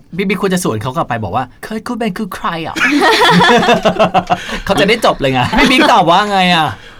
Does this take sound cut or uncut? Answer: cut